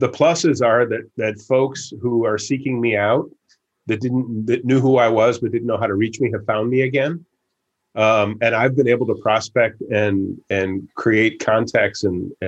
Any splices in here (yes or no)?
no